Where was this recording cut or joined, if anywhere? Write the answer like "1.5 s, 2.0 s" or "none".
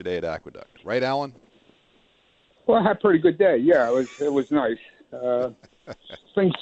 none